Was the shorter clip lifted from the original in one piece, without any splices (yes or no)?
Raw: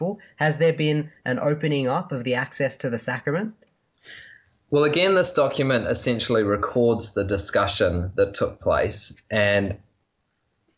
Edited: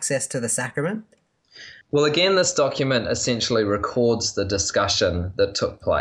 no